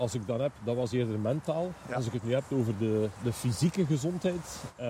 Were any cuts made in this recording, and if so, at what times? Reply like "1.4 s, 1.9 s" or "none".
none